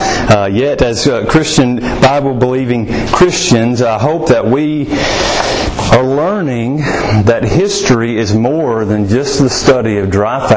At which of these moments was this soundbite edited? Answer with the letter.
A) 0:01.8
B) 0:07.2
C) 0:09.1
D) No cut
D